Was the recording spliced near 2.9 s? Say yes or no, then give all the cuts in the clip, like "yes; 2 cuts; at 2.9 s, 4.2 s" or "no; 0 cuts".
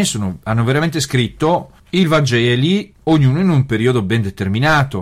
yes; 2 cuts; at 1.8 s, 2.9 s